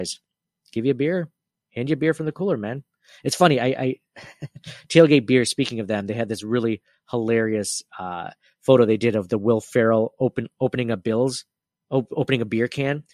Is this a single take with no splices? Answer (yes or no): yes